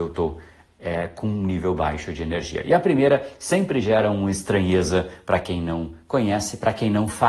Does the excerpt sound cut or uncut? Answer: uncut